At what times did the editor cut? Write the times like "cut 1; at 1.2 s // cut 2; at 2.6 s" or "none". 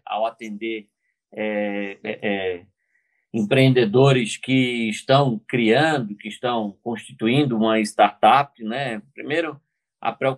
none